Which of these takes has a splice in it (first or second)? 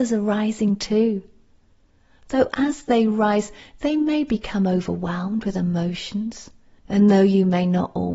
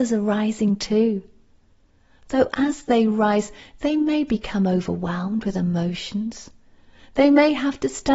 first